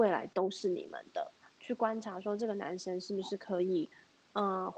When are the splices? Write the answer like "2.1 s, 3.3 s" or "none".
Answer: 1.4 s